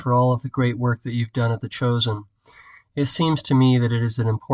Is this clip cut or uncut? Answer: uncut